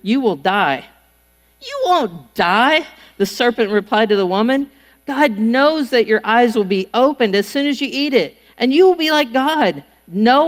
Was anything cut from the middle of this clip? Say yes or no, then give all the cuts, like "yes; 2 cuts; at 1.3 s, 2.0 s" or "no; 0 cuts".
no; 0 cuts